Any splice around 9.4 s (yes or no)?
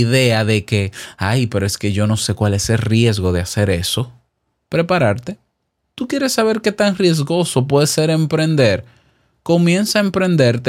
no